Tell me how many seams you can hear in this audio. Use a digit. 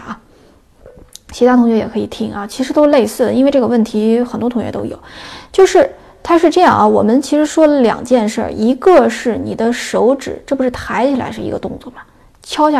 0